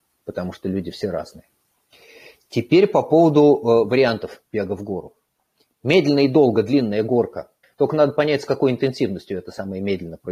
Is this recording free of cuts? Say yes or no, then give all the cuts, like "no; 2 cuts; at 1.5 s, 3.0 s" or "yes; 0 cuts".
no; 1 cut; at 7.6 s